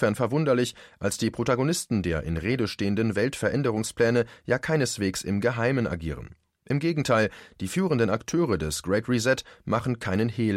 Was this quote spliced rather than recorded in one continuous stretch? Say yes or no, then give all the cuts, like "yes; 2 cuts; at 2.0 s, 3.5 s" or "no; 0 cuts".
no; 0 cuts